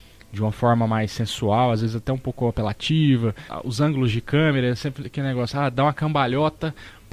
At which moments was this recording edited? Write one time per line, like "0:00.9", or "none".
0:03.5